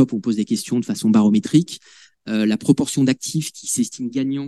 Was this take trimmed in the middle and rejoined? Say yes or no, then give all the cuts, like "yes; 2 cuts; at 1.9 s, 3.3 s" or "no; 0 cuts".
no; 0 cuts